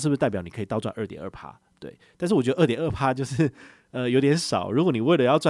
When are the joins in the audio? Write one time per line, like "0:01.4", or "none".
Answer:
none